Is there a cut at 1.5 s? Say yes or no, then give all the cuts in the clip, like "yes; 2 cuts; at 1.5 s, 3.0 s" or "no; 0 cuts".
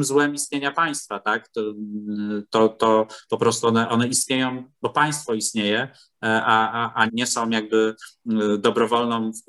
no; 2 cuts; at 3.9 s, 7.1 s